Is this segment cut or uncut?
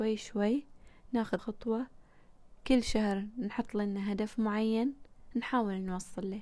cut